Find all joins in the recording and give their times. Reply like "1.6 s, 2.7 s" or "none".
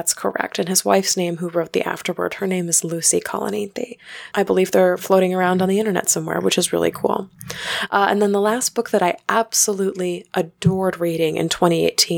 4.3 s